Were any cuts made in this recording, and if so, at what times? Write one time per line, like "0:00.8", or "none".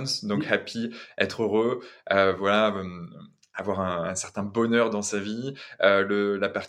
none